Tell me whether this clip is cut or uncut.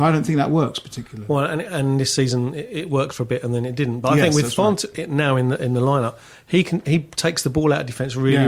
uncut